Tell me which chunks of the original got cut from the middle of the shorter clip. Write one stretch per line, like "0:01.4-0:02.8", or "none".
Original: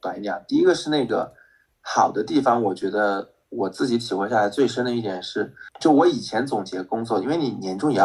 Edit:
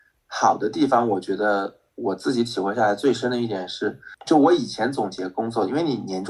none

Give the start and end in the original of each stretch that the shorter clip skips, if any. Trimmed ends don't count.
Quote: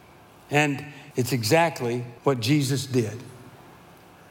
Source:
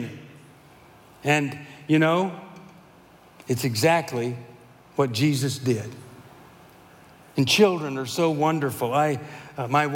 0:01.8-0:03.4
0:04.5-0:04.9

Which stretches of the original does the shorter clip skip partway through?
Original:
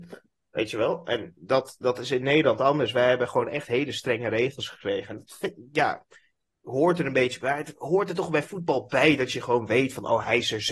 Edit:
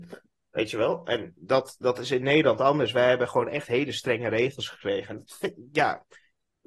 none

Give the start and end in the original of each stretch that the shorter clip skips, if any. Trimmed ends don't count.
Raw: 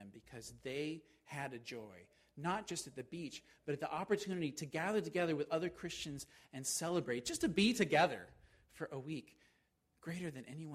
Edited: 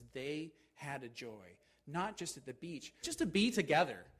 0:03.5-0:07.2

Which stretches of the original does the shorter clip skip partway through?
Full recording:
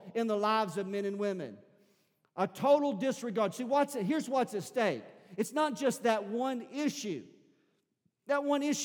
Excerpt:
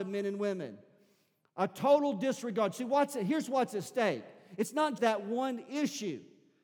0:05.8-0:06.0

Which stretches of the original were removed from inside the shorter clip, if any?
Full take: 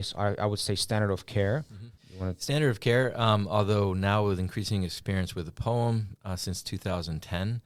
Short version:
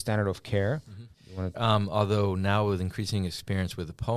0:02.4-0:03.1

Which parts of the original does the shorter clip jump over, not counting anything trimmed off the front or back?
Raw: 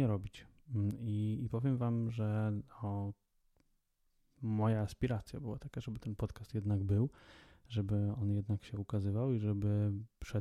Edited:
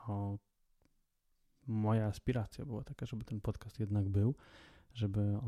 none

